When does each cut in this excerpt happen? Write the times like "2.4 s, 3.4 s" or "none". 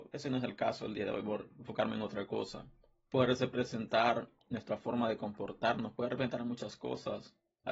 3.1 s, 5.9 s